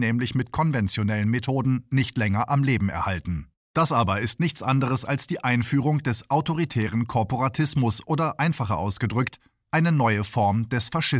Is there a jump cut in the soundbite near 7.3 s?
no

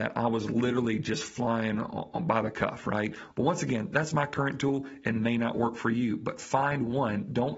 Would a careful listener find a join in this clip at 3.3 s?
yes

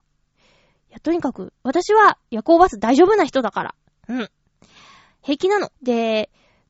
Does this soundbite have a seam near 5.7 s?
yes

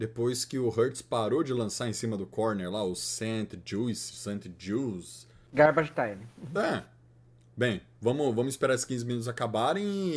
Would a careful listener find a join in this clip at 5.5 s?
yes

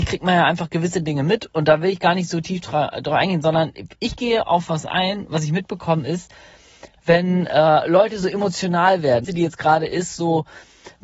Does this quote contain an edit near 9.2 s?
yes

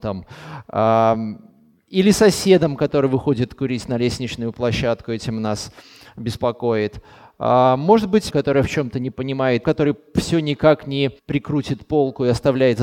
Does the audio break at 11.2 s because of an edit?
yes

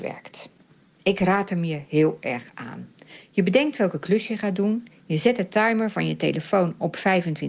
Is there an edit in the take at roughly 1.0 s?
yes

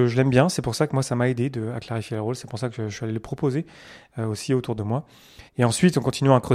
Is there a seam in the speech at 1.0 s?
no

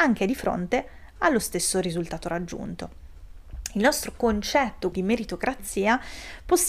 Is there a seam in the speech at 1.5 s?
no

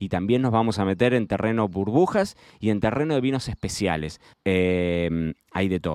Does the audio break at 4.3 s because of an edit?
yes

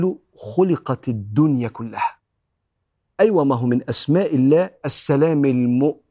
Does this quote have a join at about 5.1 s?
no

